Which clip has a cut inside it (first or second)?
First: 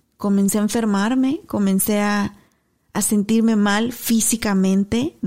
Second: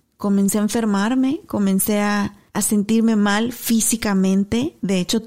second